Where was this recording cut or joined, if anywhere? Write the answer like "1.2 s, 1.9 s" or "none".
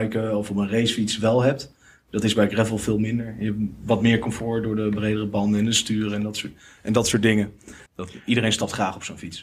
7.9 s